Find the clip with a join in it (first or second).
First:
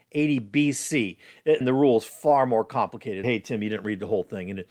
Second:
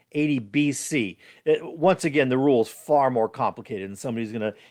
first